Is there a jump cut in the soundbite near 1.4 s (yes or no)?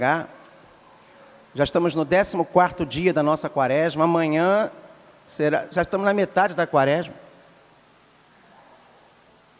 no